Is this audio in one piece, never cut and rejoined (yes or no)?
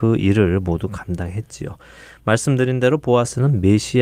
yes